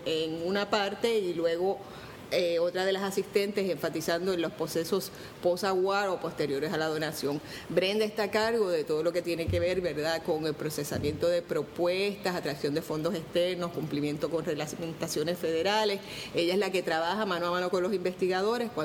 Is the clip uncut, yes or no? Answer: yes